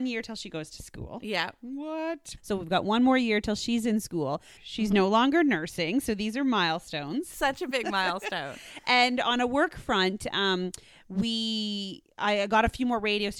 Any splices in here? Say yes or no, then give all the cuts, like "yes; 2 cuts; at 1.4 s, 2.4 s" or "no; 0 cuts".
yes; 2 cuts; at 2.4 s, 4.6 s